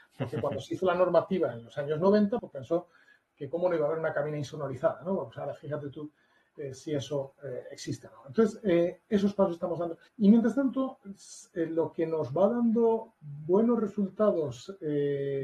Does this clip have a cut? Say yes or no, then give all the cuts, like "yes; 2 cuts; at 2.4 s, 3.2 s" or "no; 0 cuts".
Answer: yes; 2 cuts; at 2.4 s, 10.1 s